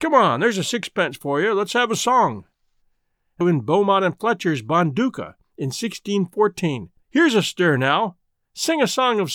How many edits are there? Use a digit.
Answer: 2